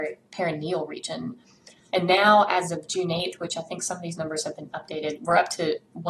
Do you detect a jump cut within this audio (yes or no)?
yes